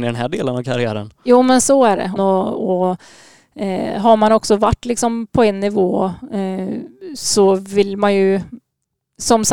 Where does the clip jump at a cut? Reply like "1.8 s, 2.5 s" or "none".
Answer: 2.2 s